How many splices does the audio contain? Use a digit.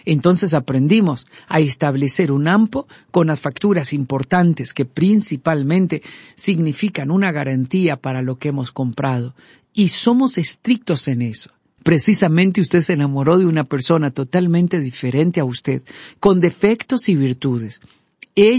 1